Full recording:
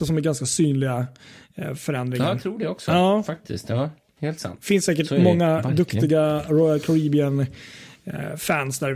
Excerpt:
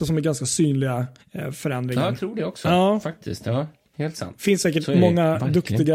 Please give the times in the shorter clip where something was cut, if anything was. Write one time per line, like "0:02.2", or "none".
0:01.2